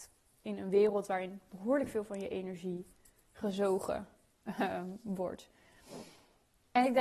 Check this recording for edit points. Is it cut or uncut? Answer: uncut